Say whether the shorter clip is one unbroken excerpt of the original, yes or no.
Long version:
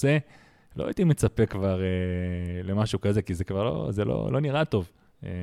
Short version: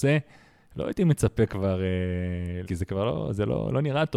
no